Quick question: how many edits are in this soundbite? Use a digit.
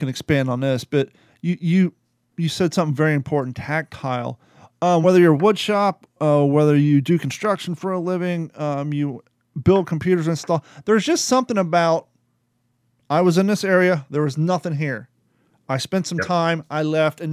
0